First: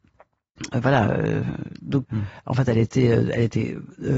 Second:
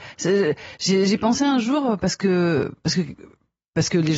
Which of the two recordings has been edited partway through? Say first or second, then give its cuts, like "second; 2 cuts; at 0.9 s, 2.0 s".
first; 1 cut; at 2.0 s